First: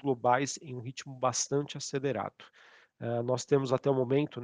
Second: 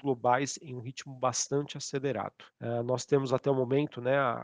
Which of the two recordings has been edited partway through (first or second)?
second